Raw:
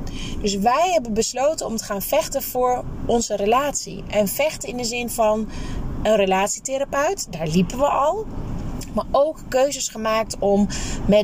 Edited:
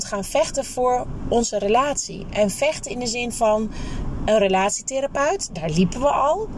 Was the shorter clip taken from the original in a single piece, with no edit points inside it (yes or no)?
yes